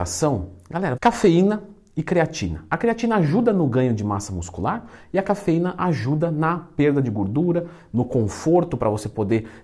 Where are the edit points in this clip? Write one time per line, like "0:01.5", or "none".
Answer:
0:01.0